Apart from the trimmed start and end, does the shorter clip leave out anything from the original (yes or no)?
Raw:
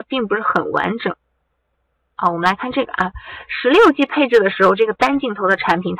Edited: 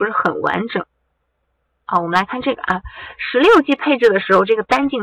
no